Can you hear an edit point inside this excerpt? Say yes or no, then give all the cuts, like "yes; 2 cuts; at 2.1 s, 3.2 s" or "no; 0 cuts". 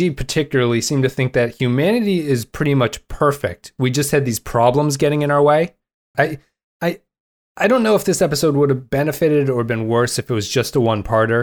yes; 1 cut; at 6.1 s